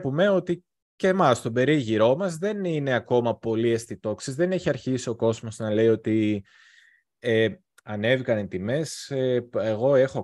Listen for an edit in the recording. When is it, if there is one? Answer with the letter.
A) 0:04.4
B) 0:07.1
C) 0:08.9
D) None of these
D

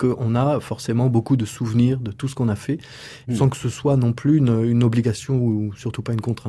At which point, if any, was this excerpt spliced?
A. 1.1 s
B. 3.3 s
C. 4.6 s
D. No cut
B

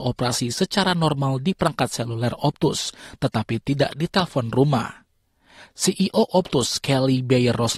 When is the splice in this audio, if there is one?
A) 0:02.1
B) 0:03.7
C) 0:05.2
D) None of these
D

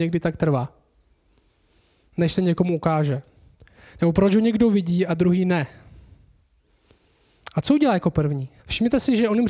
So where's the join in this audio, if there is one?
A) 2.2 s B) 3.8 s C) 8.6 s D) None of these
C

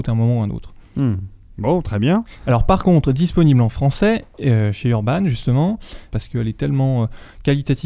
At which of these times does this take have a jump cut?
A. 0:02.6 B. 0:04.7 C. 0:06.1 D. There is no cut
C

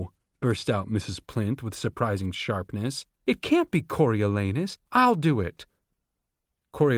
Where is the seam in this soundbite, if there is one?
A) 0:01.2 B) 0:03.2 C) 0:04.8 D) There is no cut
C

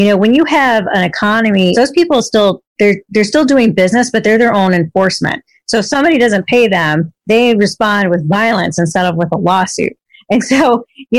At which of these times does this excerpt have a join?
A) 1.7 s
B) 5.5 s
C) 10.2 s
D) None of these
A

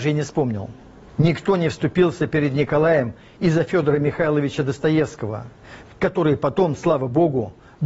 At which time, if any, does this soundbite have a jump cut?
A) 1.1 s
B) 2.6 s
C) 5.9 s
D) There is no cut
C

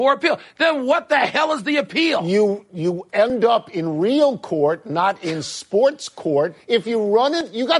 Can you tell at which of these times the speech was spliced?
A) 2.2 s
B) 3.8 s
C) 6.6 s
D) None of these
C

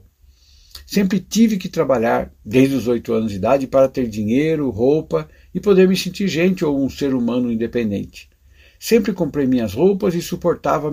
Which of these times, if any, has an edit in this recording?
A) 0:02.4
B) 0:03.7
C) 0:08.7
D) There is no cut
D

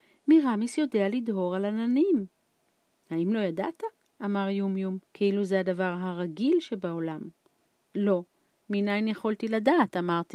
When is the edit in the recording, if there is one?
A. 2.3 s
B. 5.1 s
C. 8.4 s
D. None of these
B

